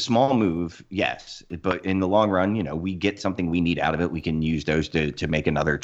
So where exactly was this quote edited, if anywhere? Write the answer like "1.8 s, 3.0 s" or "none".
none